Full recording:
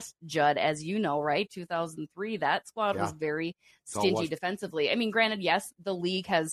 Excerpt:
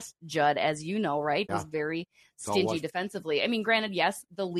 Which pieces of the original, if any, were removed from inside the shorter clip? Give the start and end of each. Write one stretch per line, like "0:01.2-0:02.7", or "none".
0:01.5-0:03.0